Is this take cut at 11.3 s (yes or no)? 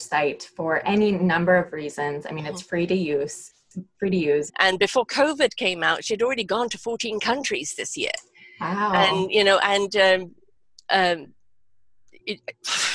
no